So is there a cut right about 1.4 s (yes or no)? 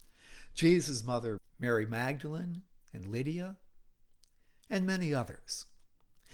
yes